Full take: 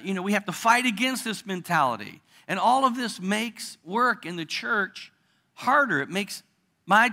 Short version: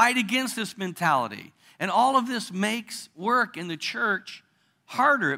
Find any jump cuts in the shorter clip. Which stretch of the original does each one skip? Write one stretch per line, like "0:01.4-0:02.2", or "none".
none